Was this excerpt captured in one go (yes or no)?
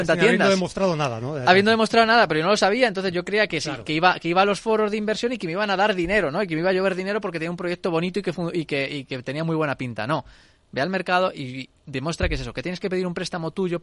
yes